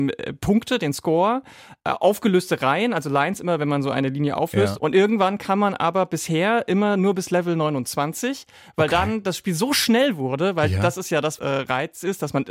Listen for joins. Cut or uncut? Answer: cut